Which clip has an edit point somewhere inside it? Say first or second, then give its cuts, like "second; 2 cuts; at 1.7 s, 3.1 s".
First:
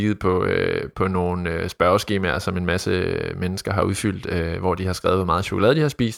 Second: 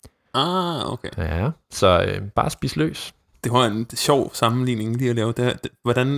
second; 1 cut; at 3.3 s